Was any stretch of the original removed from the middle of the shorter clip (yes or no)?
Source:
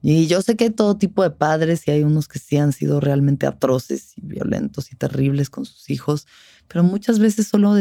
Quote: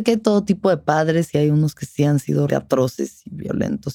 yes